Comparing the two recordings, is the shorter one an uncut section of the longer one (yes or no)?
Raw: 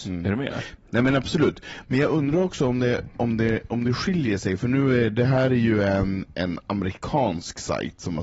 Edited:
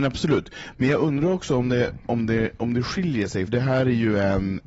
no